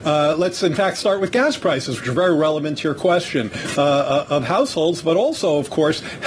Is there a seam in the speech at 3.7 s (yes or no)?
yes